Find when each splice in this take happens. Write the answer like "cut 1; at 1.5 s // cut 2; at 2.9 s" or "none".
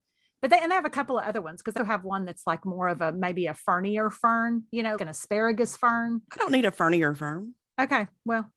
cut 1; at 1.8 s // cut 2; at 5.0 s